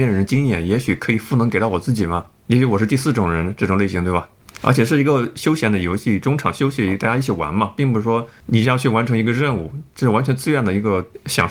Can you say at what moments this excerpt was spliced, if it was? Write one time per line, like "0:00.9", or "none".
none